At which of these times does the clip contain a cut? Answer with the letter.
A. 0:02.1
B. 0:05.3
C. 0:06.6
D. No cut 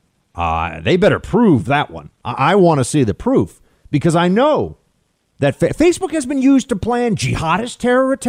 D